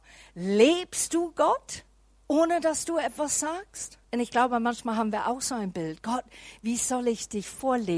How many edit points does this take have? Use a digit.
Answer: 1